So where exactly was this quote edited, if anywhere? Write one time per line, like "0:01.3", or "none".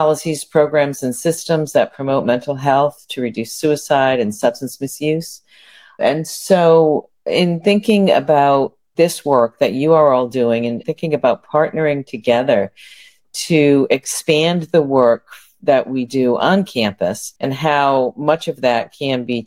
0:17.4